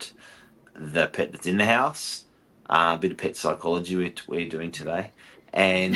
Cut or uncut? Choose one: uncut